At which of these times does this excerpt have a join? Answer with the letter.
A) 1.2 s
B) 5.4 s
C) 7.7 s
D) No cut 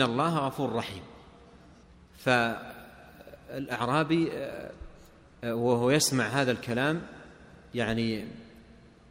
D